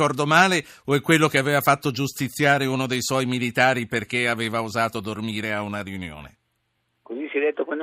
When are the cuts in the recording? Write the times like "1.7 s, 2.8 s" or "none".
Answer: none